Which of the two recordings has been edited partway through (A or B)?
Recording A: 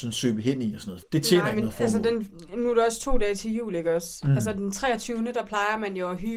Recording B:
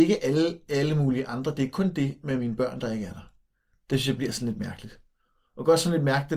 A